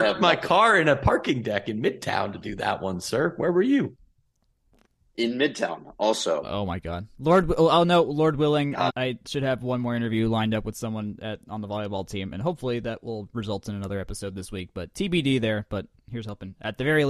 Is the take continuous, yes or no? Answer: no